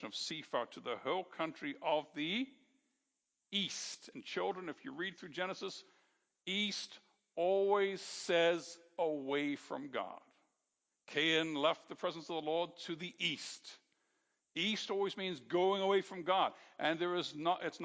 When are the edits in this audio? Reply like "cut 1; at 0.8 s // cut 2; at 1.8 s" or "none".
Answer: cut 1; at 10.9 s